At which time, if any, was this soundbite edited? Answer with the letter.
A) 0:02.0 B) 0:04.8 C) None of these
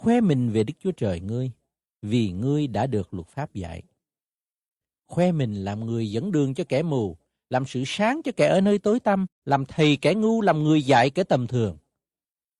A